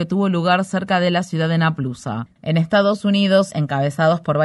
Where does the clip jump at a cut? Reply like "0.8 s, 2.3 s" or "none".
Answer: 2.3 s, 3.5 s